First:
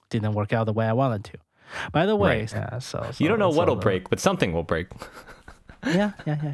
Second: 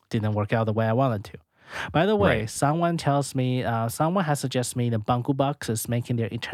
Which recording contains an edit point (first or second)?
first